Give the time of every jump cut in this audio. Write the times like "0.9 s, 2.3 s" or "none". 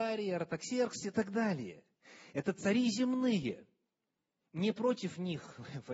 none